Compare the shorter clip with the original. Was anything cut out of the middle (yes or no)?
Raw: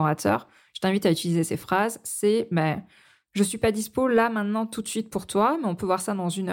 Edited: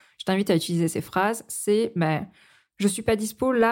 no